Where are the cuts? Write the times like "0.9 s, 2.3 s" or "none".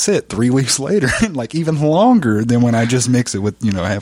none